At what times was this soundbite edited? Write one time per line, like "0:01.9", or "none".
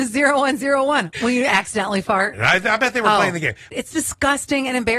0:01.1
0:02.3
0:03.7

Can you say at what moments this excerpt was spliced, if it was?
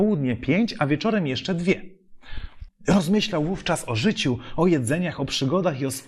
0:02.7

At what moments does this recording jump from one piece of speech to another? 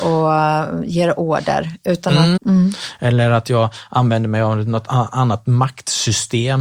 0:02.4

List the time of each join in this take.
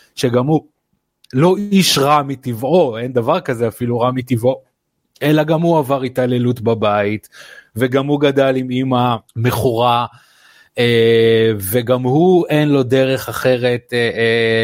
0:09.3

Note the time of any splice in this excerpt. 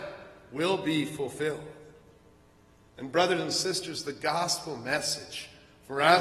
none

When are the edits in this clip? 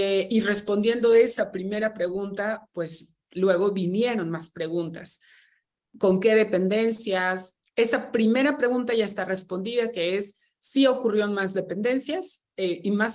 0:07.6

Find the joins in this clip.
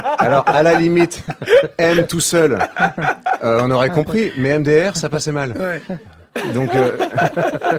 none

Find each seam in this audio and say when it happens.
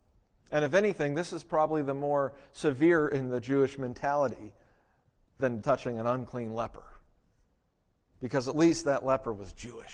0:05.6

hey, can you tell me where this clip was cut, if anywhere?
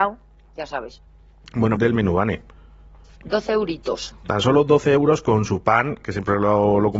0:01.8

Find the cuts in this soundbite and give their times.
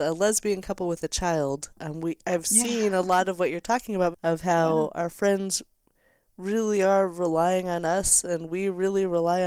0:04.1

